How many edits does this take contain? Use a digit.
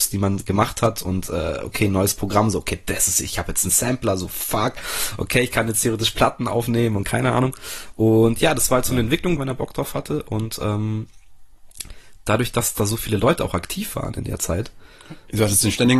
1